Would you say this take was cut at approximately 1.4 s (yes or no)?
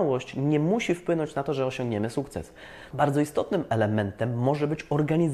no